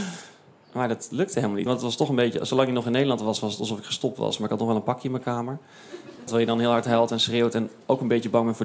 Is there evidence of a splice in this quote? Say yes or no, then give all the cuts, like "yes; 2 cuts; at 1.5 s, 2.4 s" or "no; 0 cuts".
yes; 2 cuts; at 1.7 s, 6.3 s